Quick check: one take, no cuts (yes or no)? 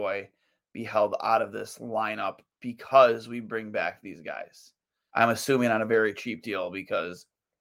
no